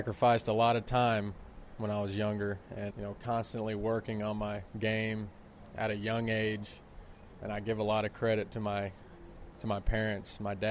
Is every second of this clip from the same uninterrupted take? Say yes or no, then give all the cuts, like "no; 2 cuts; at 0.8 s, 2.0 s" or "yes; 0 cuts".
no; 1 cut; at 2.9 s